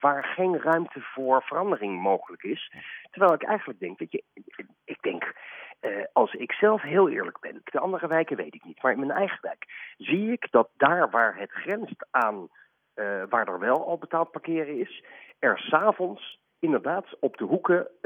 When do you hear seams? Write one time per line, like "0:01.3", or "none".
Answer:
0:07.6